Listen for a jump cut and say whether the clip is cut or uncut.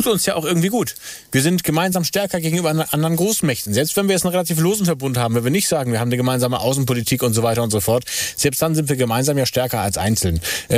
uncut